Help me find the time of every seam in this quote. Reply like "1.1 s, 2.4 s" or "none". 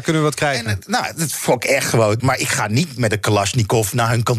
2.2 s